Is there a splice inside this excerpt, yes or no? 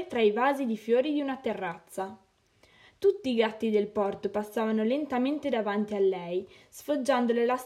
no